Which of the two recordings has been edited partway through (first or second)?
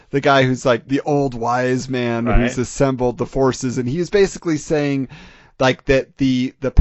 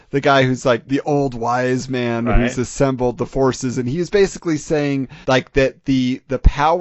second